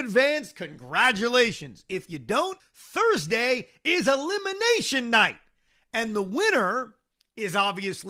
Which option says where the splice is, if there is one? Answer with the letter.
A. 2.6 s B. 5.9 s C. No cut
A